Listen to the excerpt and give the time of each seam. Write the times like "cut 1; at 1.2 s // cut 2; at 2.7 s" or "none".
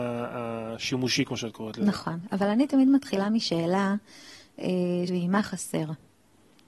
cut 1; at 5.1 s